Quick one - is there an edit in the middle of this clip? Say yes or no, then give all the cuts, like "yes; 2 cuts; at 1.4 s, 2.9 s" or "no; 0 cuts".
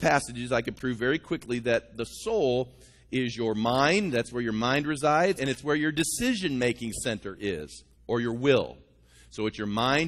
yes; 2 cuts; at 5.4 s, 7.9 s